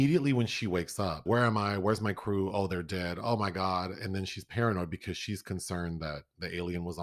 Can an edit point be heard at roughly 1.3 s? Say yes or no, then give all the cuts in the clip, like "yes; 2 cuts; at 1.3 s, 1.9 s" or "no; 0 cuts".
yes; 1 cut; at 1.3 s